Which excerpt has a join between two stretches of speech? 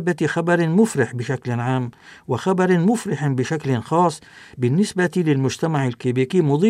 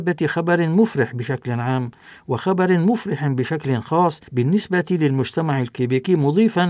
second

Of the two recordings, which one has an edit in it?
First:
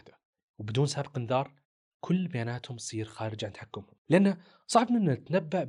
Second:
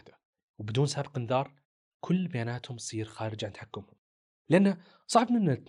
first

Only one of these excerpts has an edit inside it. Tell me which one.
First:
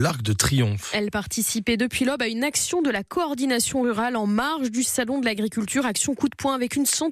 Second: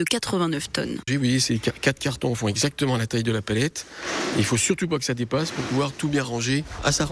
second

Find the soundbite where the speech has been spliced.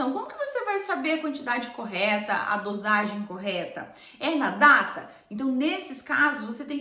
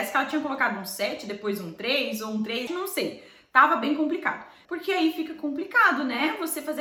second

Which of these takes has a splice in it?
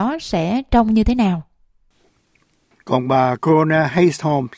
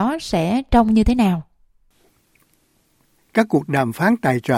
first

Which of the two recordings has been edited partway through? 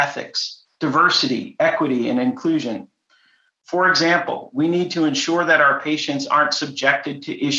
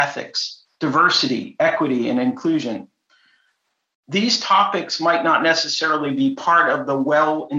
first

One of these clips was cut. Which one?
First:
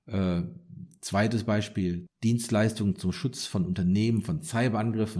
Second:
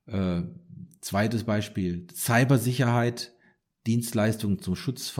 first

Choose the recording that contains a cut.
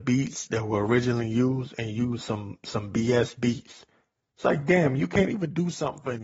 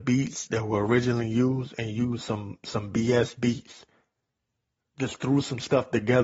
first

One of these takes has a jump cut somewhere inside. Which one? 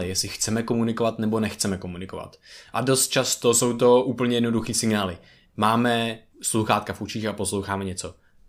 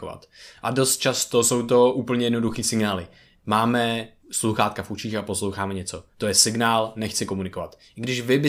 second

